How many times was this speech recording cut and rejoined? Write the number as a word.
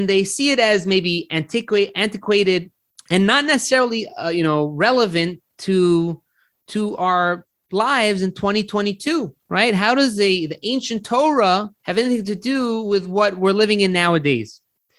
three